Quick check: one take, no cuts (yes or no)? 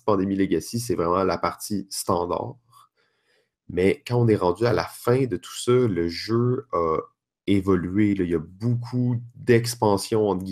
yes